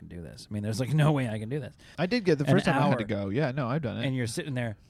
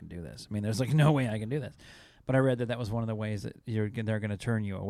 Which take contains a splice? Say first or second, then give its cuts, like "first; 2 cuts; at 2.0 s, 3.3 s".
first; 1 cut; at 1.9 s